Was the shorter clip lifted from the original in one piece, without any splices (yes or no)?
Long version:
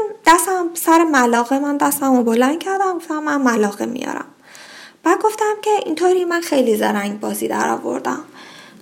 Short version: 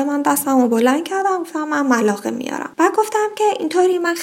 no